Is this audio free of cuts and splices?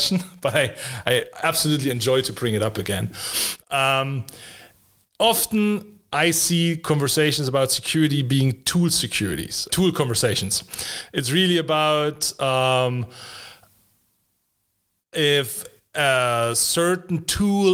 no; 1 cut; at 9.7 s

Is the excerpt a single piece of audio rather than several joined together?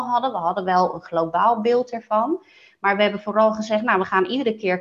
yes; 0 cuts

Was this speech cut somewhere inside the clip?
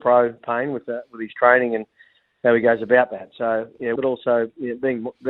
yes; 1 cut; at 4.0 s

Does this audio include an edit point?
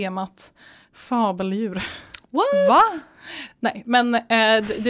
no; 0 cuts

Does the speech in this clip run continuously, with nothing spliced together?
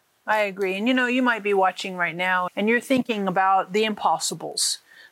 no; 1 cut; at 2.5 s

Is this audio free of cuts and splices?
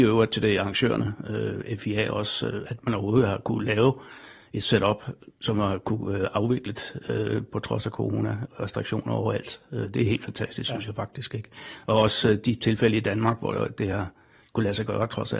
yes; 0 cuts

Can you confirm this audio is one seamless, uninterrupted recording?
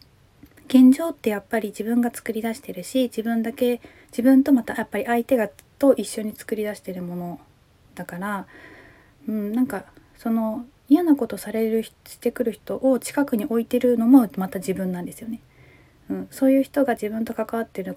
yes; 0 cuts

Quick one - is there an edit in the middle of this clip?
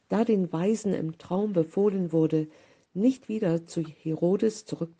no; 0 cuts

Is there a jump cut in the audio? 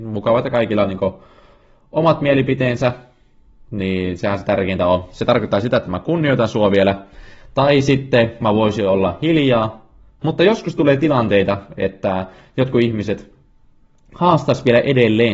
yes; 1 cut; at 10.2 s

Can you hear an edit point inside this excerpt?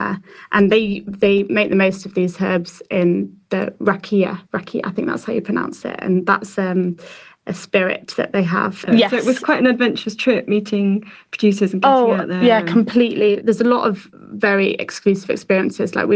yes; 2 cuts; at 4.5 s, 8.9 s

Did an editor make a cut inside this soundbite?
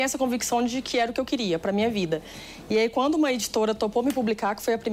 no; 0 cuts

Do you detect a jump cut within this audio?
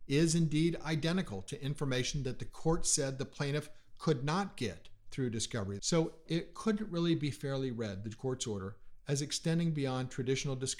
yes; 1 cut; at 5.8 s

